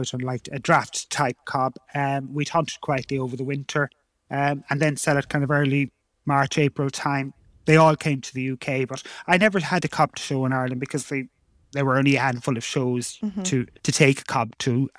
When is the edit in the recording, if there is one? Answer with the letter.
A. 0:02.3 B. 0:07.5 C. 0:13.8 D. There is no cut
C